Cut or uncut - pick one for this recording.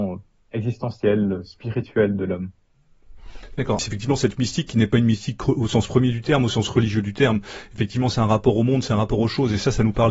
cut